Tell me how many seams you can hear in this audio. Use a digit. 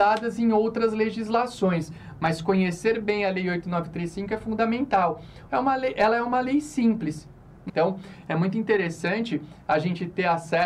2